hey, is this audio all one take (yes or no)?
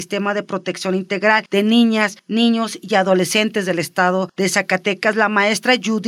yes